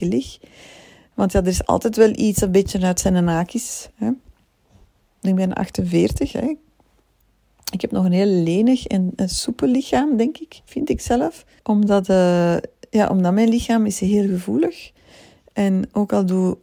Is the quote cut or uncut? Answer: cut